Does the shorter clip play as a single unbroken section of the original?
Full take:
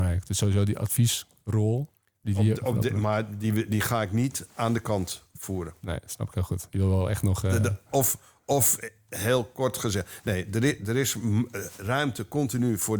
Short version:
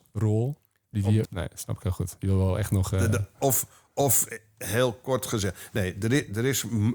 no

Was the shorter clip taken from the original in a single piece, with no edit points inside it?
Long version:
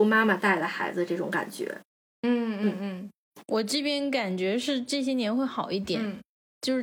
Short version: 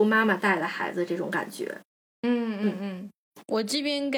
yes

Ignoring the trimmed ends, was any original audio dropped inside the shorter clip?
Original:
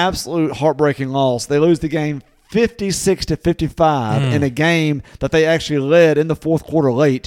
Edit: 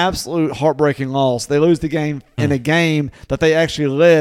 yes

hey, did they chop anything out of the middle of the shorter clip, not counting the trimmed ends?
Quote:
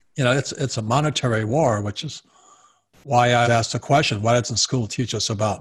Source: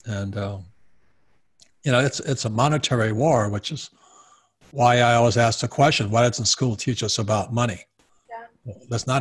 yes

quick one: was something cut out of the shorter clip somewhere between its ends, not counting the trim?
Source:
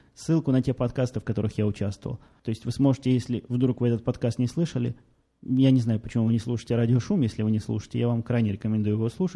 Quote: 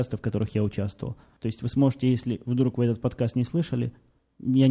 no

